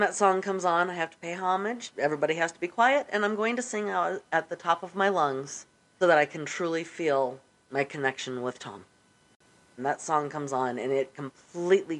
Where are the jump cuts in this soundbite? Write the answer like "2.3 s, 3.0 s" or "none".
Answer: 6.0 s, 9.8 s